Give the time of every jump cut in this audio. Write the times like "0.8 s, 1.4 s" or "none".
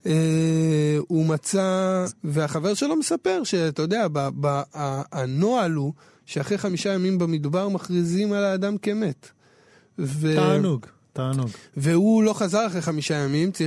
2.1 s